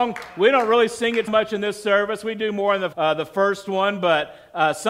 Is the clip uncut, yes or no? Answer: no